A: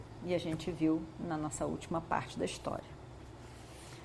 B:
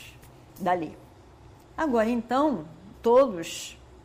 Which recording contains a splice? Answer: B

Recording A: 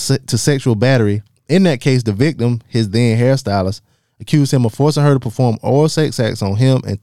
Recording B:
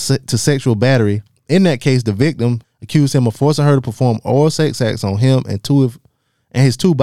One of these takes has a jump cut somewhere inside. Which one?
B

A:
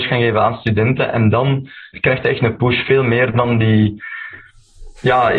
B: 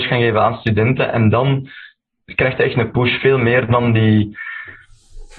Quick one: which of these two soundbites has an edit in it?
A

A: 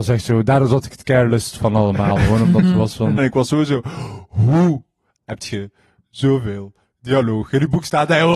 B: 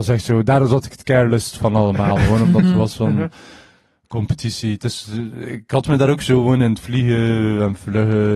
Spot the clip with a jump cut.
A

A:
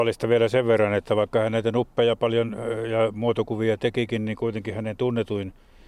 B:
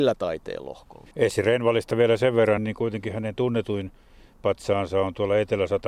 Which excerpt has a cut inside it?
B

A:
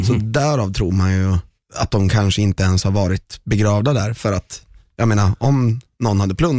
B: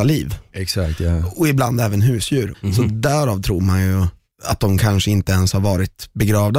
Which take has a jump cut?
B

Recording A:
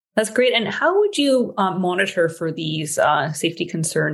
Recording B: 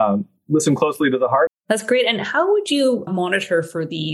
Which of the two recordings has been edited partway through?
B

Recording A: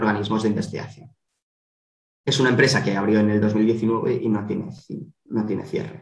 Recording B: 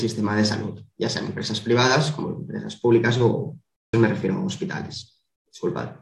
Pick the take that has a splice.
B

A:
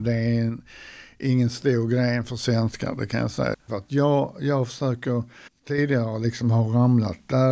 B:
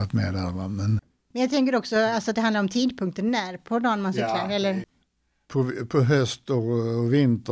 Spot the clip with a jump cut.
A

